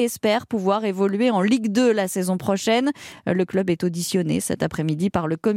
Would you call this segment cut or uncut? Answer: uncut